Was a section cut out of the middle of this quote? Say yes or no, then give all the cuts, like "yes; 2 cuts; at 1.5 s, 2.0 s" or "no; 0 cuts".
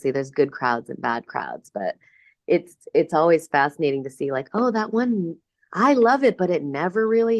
no; 0 cuts